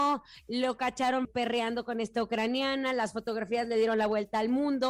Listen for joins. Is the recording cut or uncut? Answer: cut